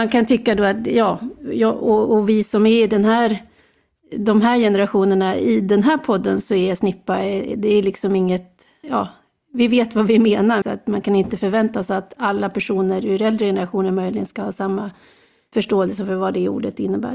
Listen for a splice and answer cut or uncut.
cut